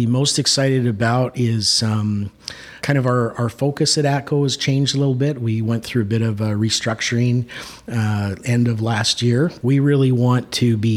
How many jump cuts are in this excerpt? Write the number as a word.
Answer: two